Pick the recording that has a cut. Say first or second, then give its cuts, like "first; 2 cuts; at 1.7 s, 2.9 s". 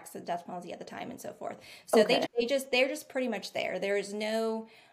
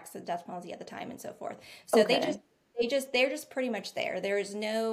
first; 1 cut; at 2.3 s